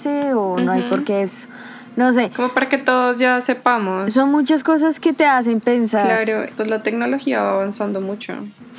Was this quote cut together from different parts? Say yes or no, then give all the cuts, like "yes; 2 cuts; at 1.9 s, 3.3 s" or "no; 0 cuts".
yes; 1 cut; at 6.5 s